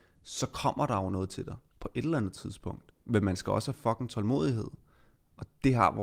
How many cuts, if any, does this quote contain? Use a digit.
1